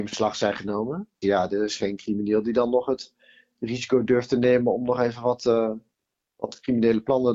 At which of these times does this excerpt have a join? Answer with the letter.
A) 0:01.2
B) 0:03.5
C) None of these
A